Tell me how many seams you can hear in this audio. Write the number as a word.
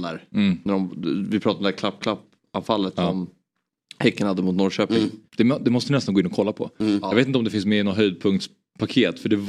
one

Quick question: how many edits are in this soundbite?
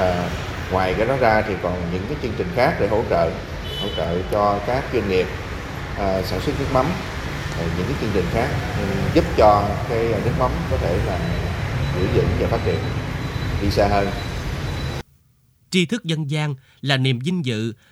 one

